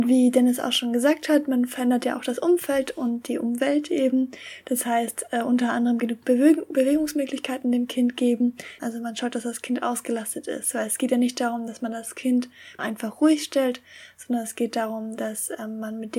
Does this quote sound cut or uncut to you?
cut